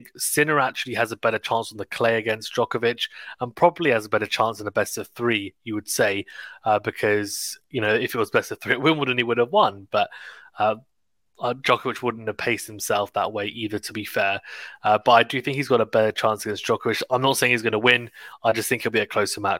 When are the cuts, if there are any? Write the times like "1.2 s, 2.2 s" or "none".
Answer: none